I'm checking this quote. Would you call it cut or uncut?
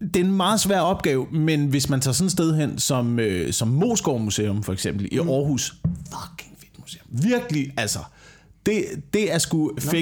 uncut